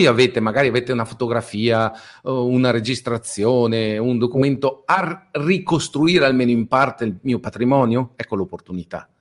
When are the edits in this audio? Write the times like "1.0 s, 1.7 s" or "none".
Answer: none

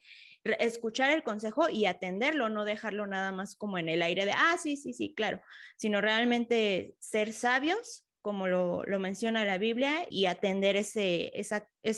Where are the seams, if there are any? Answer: 10.1 s

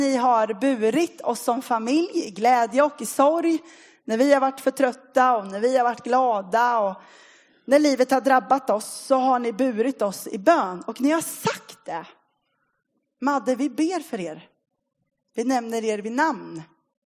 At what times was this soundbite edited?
none

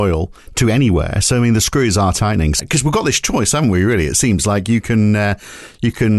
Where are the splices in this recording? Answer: 2.6 s

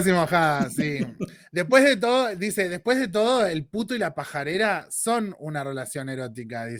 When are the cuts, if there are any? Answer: none

